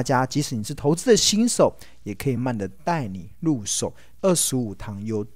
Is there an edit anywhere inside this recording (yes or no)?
yes